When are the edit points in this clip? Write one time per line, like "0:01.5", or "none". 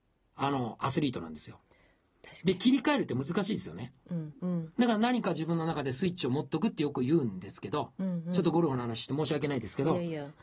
0:04.3